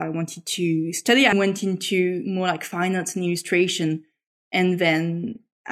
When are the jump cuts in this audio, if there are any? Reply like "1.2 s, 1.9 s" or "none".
1.3 s